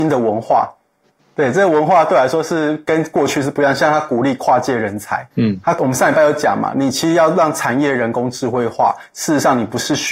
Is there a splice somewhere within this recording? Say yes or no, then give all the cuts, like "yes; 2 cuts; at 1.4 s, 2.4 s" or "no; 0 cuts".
no; 0 cuts